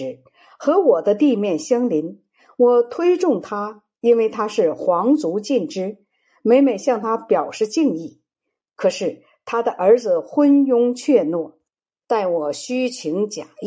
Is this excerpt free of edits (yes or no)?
yes